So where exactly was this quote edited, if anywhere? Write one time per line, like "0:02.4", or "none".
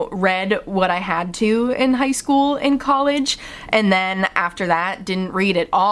none

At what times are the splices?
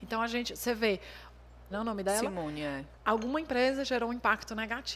0:01.7
0:03.0

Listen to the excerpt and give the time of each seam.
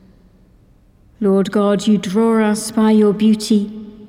0:01.1

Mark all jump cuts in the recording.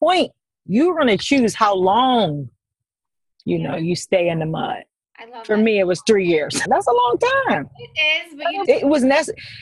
0:05.0
0:06.6
0:08.6

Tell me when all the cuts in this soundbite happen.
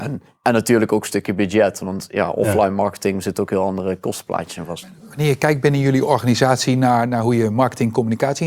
none

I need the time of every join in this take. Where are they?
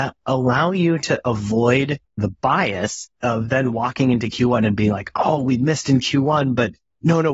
none

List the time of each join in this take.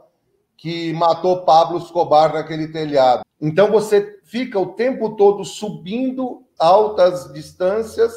0:03.2
0:06.6

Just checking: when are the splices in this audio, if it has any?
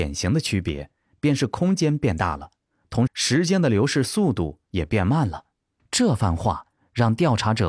0:03.1
0:05.8

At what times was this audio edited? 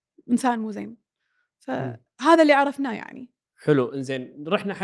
none

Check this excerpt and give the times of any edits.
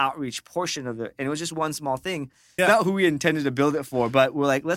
0:02.6

